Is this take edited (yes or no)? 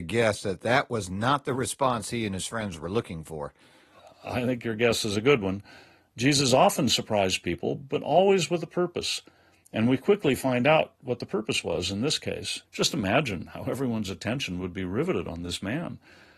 yes